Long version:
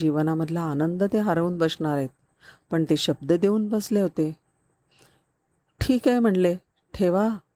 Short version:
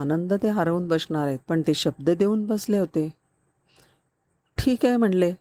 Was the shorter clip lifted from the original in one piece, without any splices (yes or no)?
no